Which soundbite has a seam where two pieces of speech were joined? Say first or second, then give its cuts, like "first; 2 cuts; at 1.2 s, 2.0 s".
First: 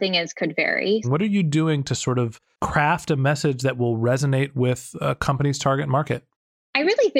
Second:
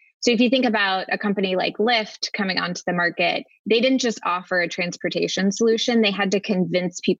first; 1 cut; at 1.0 s